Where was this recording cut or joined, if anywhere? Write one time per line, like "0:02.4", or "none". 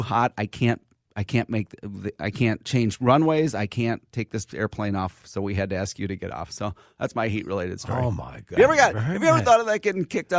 none